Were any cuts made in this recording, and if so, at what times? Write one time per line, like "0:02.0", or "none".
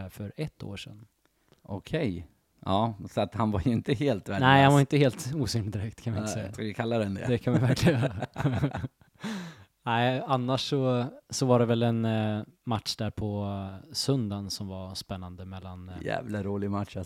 0:06.5